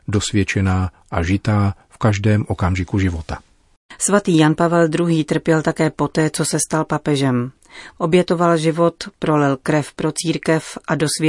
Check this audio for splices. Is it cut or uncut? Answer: cut